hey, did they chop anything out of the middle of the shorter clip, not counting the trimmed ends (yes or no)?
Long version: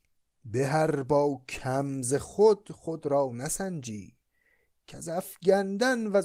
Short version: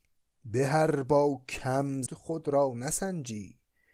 yes